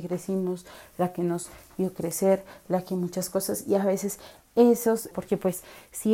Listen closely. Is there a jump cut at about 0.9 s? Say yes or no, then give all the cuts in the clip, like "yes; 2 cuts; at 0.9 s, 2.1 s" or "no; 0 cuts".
no; 1 cut; at 5.1 s